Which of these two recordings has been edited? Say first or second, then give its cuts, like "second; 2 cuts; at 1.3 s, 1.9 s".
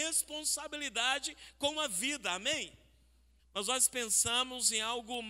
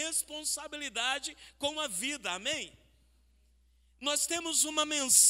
first; 1 cut; at 3.4 s